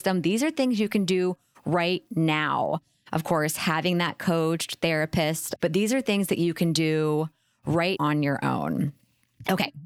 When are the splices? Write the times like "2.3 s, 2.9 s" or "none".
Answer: 5.6 s, 8.0 s